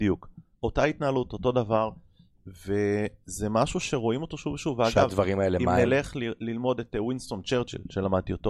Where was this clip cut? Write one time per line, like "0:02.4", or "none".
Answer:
none